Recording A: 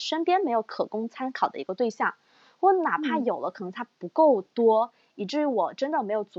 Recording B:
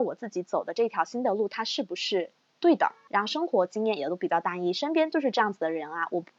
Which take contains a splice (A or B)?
B